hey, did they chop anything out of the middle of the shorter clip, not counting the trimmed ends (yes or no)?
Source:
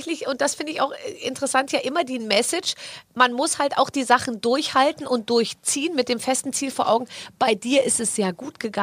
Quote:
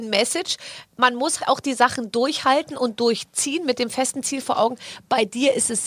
yes